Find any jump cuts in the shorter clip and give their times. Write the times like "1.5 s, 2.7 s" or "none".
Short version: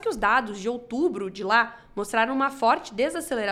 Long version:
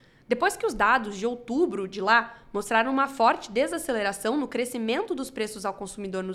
none